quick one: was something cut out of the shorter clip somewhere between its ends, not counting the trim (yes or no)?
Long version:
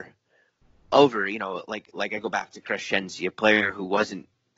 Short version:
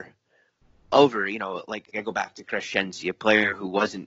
yes